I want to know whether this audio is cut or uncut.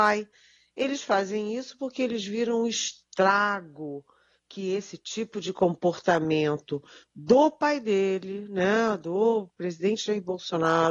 uncut